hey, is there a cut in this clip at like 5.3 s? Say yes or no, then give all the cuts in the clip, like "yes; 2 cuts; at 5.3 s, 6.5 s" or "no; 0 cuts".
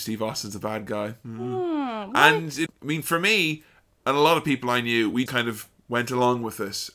yes; 2 cuts; at 2.7 s, 5.3 s